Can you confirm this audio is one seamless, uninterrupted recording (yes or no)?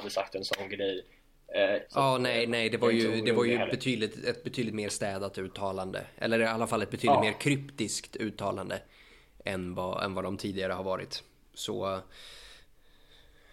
no